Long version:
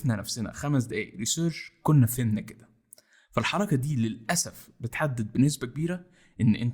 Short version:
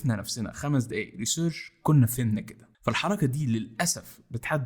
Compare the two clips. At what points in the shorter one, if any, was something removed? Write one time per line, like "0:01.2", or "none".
0:02.7